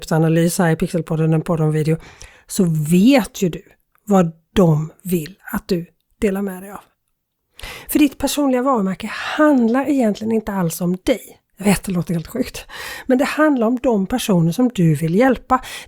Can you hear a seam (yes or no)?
no